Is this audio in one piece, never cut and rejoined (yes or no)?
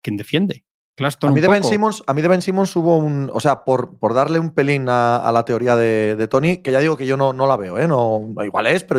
yes